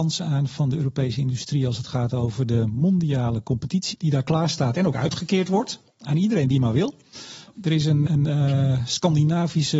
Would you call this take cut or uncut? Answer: cut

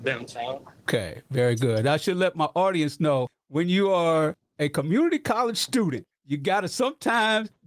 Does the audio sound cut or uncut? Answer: cut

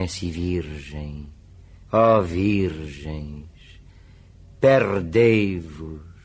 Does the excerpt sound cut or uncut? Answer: cut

